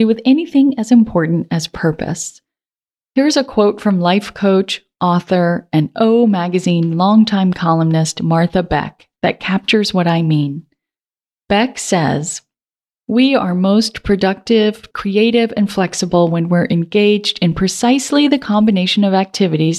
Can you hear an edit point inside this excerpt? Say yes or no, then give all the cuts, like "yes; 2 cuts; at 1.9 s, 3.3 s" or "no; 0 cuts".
yes; 1 cut; at 14.9 s